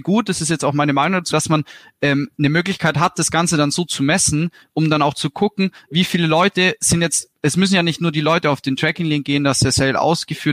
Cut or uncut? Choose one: cut